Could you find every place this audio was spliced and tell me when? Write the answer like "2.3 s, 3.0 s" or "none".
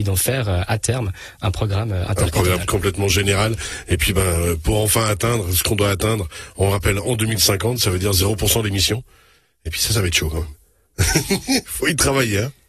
none